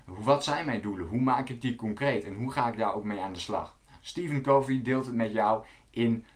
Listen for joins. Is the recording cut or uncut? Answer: uncut